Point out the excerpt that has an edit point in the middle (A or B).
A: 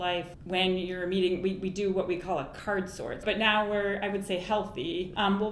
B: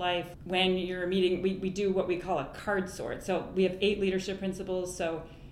A